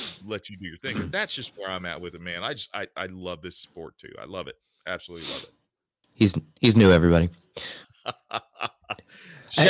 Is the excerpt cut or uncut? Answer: cut